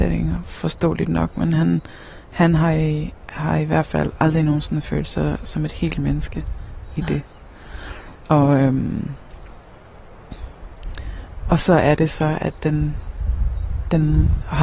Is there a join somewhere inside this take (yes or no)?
no